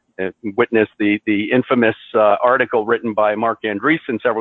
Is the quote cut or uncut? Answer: uncut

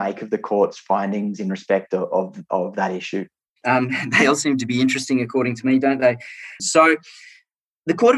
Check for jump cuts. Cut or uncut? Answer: cut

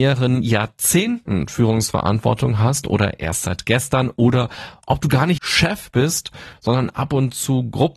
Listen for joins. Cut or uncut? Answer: cut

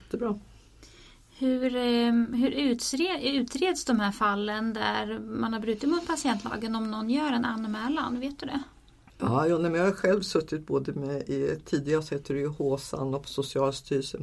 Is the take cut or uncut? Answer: uncut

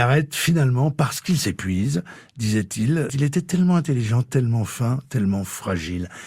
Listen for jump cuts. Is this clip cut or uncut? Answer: cut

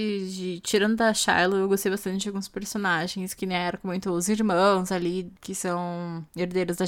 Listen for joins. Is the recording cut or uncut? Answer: uncut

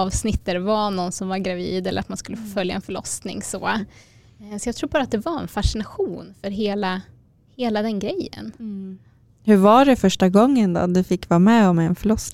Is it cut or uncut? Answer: uncut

